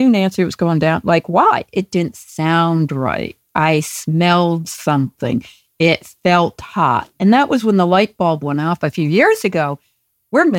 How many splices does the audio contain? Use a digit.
0